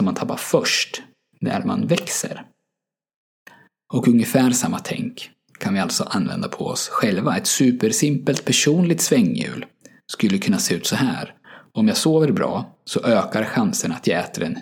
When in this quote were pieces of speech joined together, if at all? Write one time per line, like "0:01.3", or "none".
none